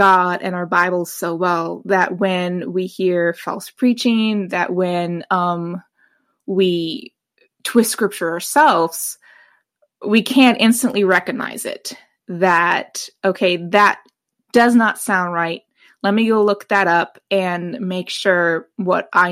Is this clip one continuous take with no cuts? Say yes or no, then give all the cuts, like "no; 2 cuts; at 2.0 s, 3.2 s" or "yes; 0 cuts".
yes; 0 cuts